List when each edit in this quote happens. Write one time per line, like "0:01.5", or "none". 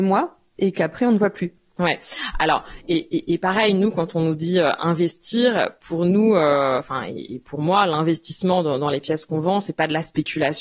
none